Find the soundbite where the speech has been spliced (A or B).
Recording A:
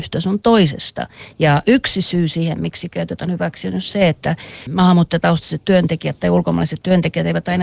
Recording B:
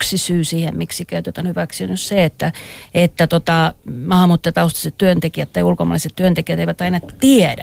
A